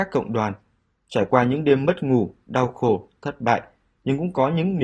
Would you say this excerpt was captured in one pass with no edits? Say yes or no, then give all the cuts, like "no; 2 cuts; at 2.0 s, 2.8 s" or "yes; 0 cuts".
yes; 0 cuts